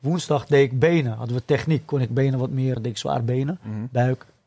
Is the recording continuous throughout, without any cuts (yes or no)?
no